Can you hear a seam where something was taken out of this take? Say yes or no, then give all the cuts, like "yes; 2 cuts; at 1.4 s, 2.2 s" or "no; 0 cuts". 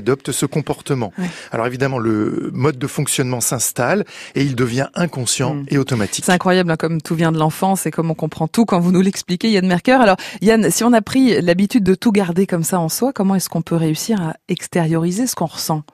yes; 1 cut; at 1.9 s